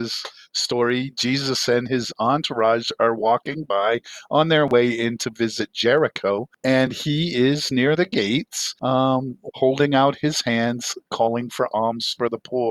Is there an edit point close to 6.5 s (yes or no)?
no